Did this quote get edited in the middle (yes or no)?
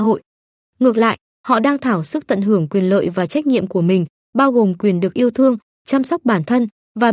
no